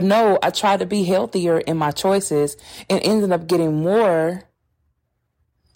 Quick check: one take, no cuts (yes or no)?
yes